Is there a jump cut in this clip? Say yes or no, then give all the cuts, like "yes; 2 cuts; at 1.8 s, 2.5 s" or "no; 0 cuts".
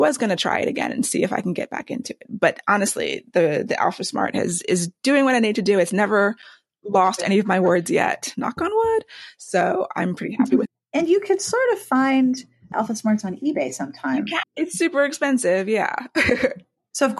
yes; 2 cuts; at 10.7 s, 14.4 s